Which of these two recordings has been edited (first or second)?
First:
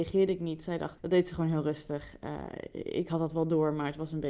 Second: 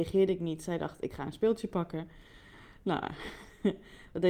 first